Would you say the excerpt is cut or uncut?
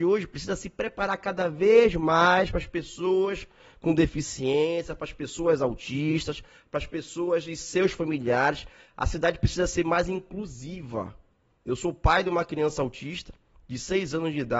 uncut